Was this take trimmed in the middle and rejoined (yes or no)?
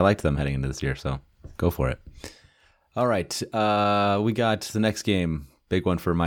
no